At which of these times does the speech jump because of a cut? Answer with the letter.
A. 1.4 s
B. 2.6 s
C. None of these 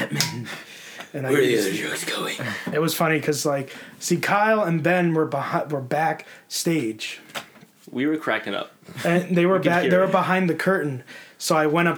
C